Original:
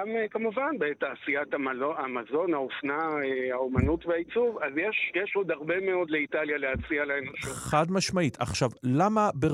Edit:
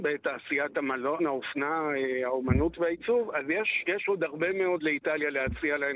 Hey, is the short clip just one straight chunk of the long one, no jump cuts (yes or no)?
no